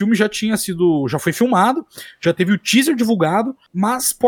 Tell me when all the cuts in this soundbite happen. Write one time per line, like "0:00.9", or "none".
none